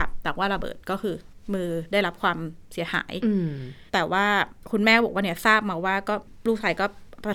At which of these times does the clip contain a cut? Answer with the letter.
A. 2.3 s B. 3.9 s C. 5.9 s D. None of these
B